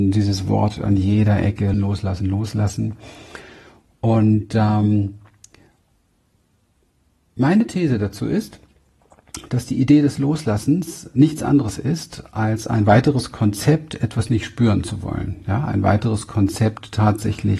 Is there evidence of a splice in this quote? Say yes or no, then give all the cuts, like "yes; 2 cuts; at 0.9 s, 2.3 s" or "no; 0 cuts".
yes; 1 cut; at 1.7 s